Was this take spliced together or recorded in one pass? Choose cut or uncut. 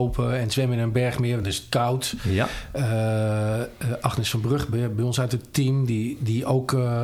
uncut